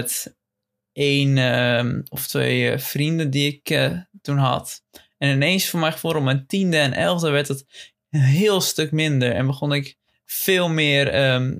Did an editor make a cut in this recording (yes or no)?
no